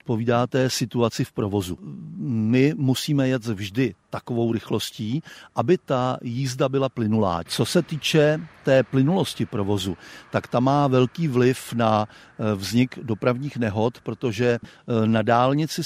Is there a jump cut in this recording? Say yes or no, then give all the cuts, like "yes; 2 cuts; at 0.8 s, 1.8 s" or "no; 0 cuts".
yes; 1 cut; at 7.5 s